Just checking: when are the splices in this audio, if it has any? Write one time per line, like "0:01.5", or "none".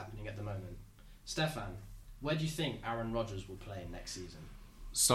none